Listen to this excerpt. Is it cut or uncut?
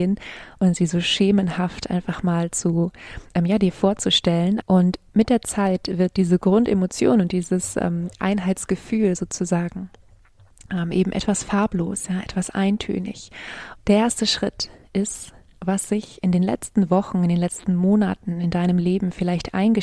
cut